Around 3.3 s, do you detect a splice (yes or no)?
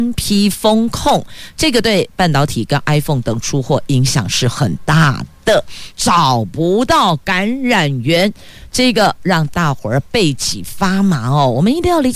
no